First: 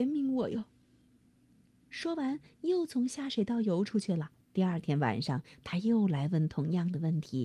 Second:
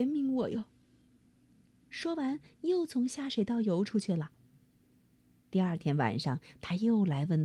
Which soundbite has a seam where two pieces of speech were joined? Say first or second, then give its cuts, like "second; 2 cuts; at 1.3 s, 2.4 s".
first; 1 cut; at 4.4 s